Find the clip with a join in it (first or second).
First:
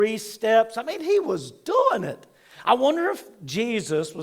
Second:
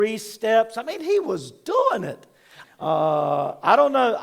second